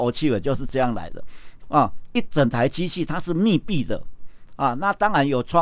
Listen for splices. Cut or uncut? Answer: cut